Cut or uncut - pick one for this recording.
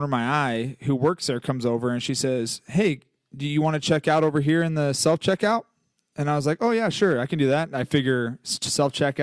uncut